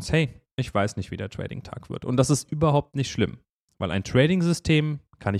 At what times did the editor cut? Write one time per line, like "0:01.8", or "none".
none